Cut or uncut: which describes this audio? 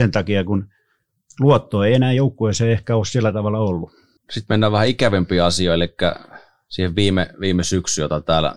cut